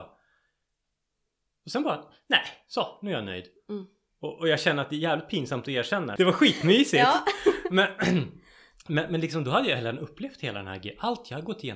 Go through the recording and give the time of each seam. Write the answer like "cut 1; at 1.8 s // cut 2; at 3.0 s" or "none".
cut 1; at 4.1 s // cut 2; at 6.2 s